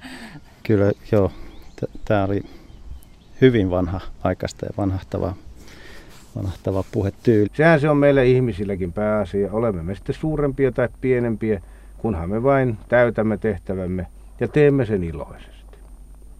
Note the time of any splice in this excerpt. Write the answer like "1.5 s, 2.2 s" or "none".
7.5 s